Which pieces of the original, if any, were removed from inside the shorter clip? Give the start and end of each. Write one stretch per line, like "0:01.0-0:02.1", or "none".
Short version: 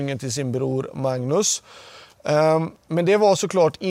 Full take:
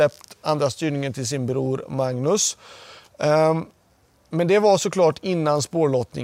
0:03.7-0:04.2